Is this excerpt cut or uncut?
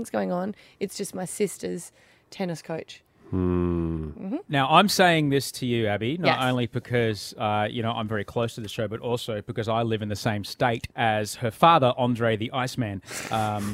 cut